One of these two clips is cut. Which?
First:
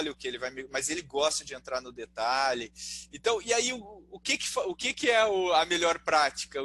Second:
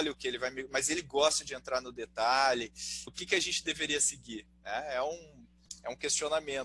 second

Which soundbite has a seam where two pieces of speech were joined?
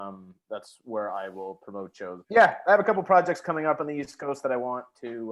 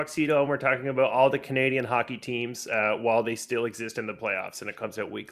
first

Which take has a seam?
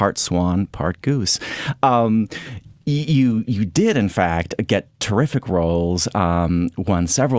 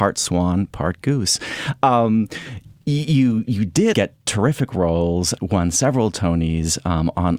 second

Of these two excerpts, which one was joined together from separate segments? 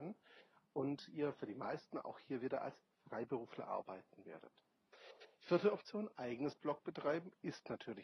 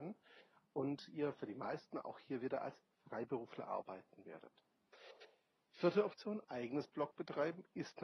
first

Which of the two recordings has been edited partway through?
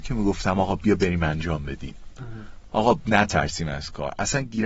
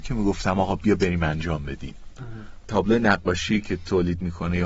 second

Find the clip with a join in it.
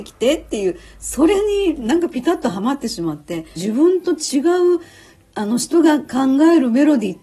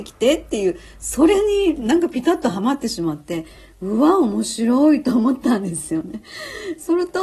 first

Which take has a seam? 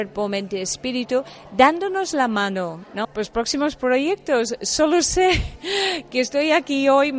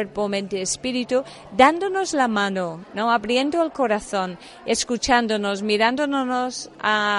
first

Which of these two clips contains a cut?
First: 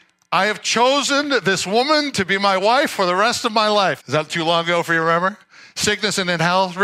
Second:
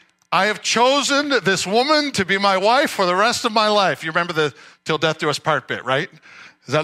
first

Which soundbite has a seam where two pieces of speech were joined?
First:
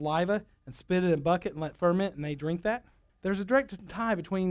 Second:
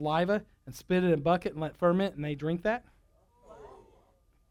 first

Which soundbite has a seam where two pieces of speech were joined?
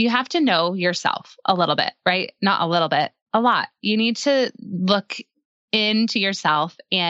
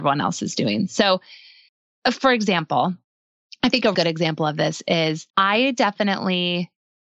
second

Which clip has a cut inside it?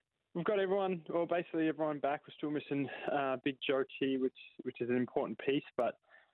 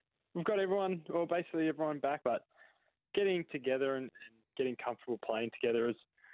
second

